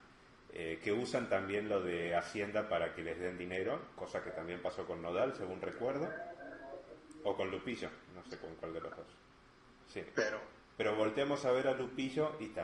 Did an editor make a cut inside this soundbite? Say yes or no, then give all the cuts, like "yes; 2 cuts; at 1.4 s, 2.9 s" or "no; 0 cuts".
yes; 1 cut; at 9.8 s